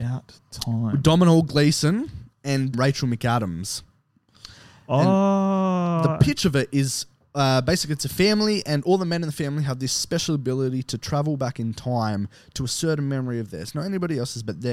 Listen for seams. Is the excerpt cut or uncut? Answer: cut